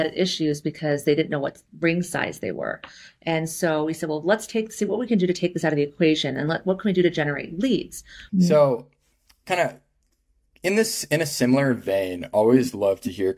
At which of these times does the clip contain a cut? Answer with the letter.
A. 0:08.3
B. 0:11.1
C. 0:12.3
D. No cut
A